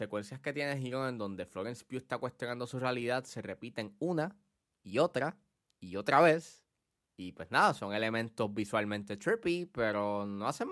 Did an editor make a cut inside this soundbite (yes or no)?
no